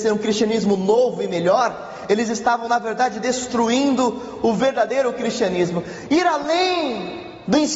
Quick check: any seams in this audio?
no; 0 cuts

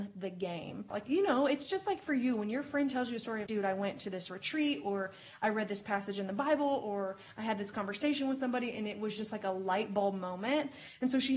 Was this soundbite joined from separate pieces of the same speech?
yes; 2 cuts; at 0.9 s, 3.5 s

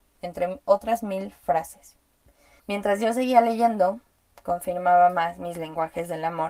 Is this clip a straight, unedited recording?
no; 1 cut; at 2.6 s

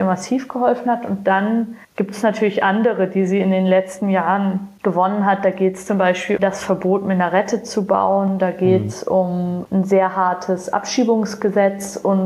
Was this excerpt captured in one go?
no; 2 cuts; at 1.8 s, 6.4 s

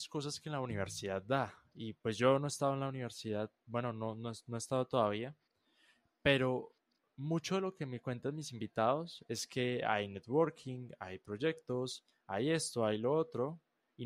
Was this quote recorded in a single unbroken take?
yes; 0 cuts

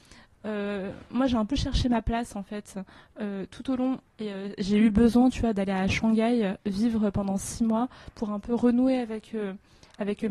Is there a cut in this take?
yes; 1 cut; at 4.1 s

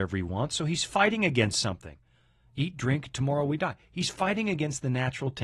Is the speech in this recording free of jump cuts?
yes; 0 cuts

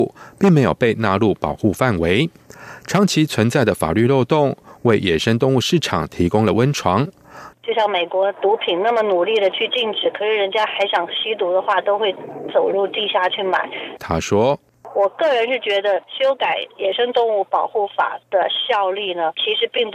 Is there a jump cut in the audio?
yes; 2 cuts; at 7.5 s, 14.0 s

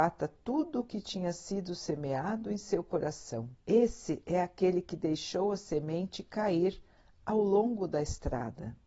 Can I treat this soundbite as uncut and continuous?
no; 1 cut; at 3.6 s

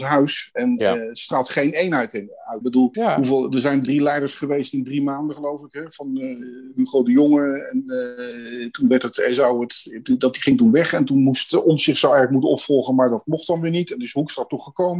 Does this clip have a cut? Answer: yes; 2 cuts; at 2.6 s, 3.8 s

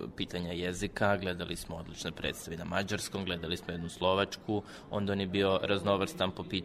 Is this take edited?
no; 0 cuts

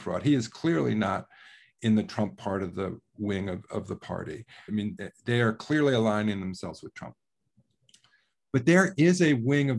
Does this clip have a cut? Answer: yes; 1 cut; at 4.7 s

